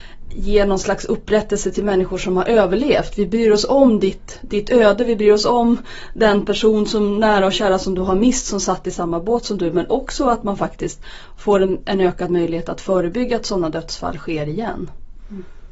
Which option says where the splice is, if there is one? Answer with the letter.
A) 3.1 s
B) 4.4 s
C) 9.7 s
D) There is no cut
D